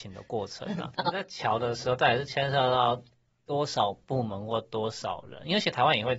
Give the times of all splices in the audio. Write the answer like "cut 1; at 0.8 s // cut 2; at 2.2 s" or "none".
cut 1; at 0.9 s